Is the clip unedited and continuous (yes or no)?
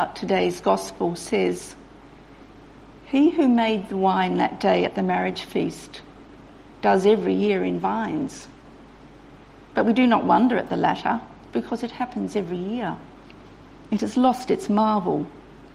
yes